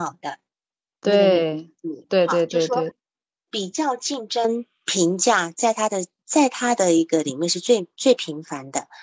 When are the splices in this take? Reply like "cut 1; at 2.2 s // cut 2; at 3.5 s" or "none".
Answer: cut 1; at 2.9 s